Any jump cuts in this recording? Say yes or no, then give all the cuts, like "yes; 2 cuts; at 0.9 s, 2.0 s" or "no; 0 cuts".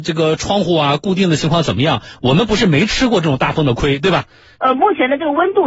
yes; 1 cut; at 4.6 s